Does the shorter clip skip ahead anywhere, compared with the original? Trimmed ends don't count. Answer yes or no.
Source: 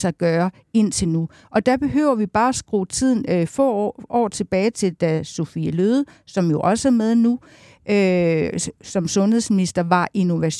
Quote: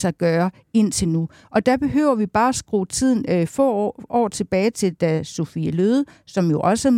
no